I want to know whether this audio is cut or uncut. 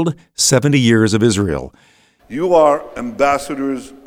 cut